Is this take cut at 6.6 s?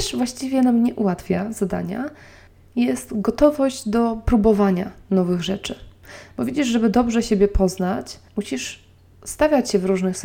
no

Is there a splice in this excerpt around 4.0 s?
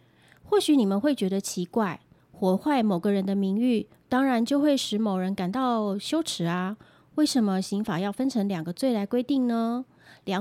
no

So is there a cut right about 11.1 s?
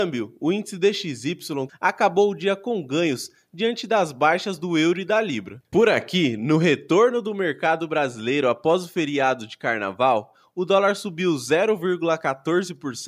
no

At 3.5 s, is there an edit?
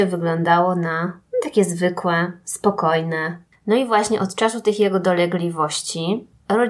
yes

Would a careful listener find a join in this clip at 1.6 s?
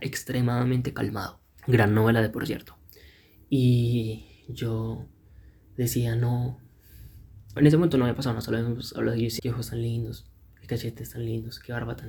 yes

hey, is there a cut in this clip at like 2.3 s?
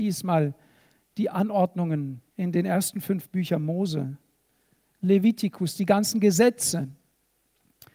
yes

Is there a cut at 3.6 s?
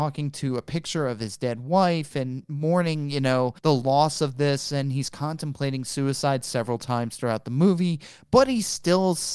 yes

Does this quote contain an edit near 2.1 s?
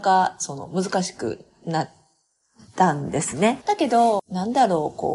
no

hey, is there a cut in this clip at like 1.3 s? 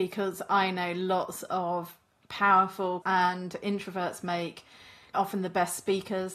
no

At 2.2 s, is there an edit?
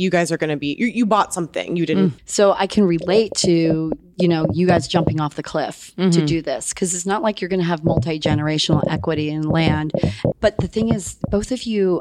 yes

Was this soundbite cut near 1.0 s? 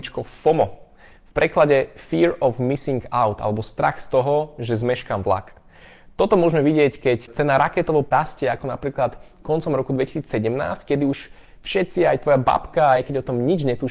no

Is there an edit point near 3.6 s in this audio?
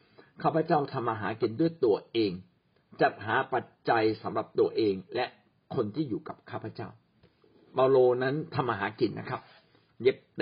no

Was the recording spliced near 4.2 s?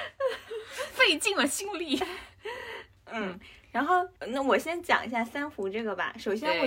yes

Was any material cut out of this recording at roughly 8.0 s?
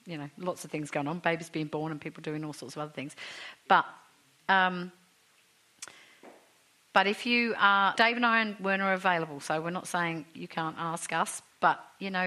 yes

